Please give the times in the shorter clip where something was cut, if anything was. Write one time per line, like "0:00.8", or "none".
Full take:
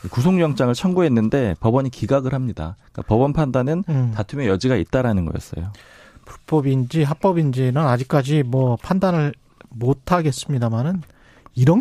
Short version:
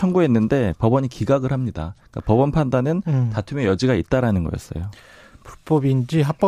none